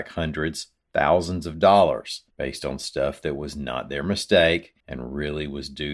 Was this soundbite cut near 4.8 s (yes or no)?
yes